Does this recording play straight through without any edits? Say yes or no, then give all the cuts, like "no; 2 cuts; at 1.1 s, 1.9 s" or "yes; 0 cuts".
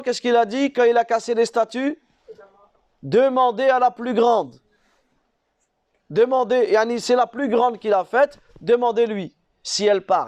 yes; 0 cuts